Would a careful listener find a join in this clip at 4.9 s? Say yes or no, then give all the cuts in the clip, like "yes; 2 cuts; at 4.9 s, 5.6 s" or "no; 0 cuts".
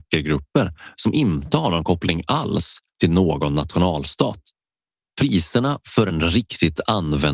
no; 0 cuts